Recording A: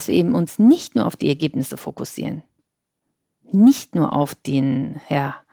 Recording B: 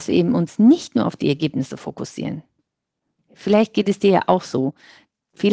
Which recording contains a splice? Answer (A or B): B